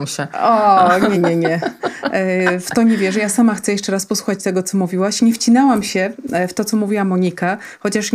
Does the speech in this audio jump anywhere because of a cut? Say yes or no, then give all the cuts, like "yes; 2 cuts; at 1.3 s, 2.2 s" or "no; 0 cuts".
yes; 1 cut; at 1.1 s